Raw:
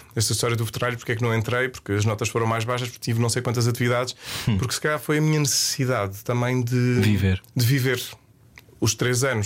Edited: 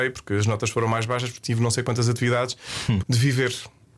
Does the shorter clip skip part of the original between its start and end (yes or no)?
yes